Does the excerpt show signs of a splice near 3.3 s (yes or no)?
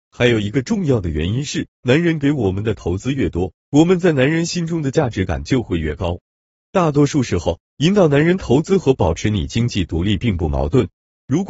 no